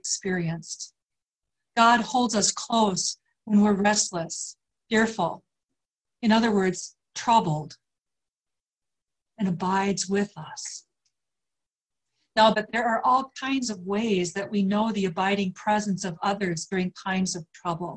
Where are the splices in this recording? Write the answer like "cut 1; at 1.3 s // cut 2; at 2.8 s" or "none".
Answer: cut 1; at 4.7 s // cut 2; at 12.5 s